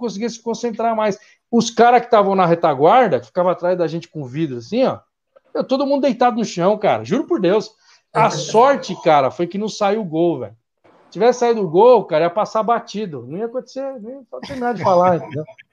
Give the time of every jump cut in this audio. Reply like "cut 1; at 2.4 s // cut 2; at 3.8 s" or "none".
none